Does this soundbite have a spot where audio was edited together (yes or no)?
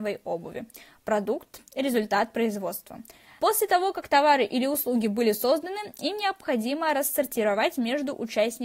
yes